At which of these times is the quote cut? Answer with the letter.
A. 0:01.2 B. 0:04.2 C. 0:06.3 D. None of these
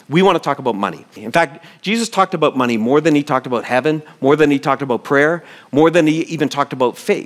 A